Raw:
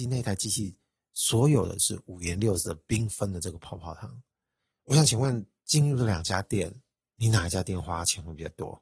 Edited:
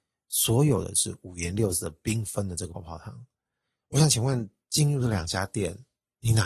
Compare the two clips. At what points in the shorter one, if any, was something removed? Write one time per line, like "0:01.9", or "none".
0:02.7